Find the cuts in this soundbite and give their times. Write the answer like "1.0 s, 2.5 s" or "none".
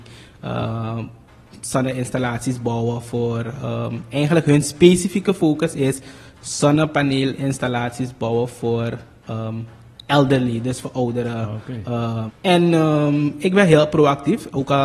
12.3 s